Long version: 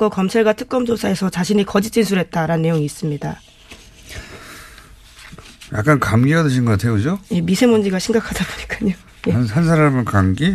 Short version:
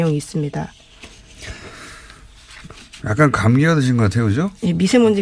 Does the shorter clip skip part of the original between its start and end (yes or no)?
no